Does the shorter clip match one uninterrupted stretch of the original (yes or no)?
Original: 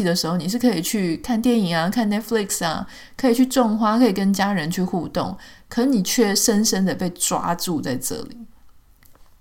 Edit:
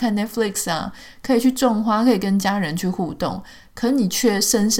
yes